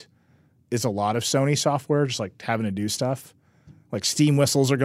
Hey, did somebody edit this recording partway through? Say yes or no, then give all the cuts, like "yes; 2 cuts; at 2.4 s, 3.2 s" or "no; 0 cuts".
no; 0 cuts